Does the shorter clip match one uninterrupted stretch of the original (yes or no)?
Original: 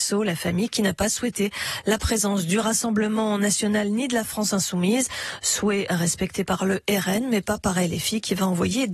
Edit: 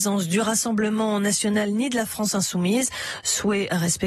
yes